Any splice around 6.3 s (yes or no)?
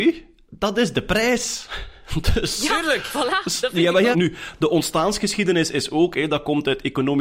no